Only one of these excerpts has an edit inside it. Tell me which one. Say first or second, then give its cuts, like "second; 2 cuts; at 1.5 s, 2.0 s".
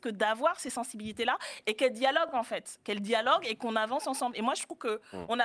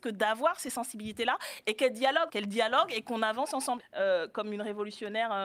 second; 2 cuts; at 2.3 s, 3.8 s